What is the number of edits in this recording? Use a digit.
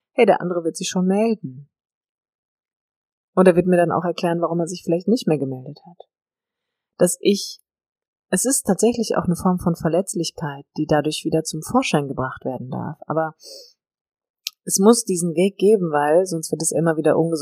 0